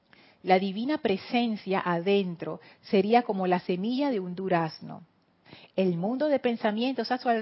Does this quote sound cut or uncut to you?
uncut